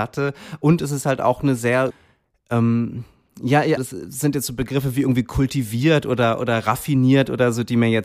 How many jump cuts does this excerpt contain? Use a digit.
1